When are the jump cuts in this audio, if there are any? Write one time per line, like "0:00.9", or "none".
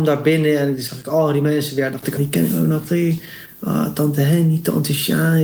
0:02.2